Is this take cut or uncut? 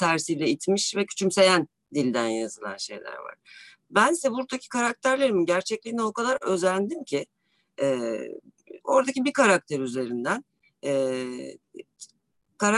uncut